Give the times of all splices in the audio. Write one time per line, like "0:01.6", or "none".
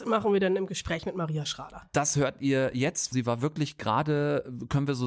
0:03.1

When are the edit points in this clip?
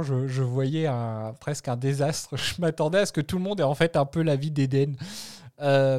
none

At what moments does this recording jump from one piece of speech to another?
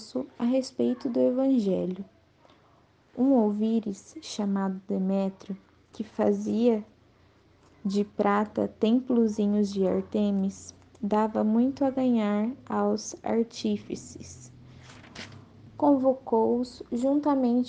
none

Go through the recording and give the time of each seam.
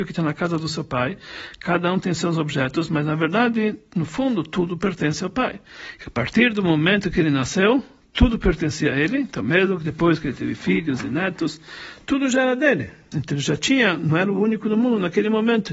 0:06.0
0:13.1

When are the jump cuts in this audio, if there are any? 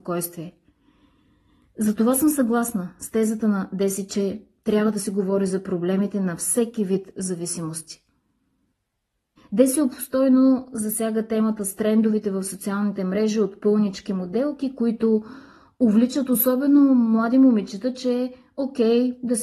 0:09.4

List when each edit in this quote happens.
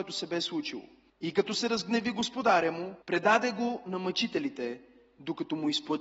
0:01.1
0:03.0

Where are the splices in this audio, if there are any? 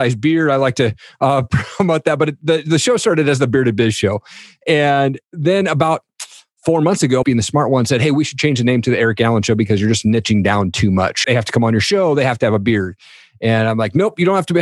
0:07.2
0:11.2

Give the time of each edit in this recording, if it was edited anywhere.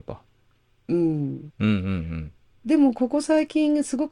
0:01.5

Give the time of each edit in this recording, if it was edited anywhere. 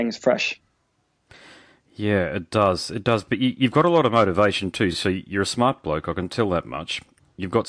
none

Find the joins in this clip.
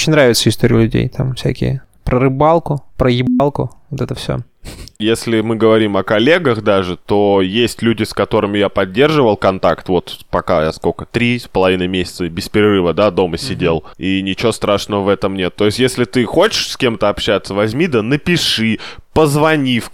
0:13.9

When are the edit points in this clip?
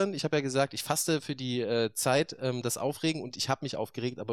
none

